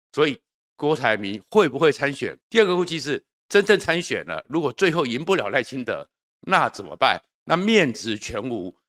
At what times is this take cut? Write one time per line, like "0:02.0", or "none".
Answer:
0:02.4
0:06.2